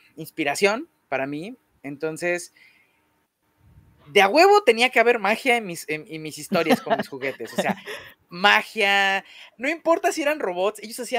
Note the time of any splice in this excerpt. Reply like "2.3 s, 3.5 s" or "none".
none